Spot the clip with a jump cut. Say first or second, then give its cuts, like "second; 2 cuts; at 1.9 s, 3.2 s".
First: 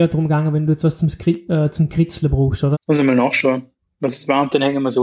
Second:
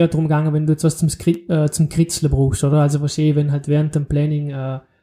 first; 1 cut; at 2.7 s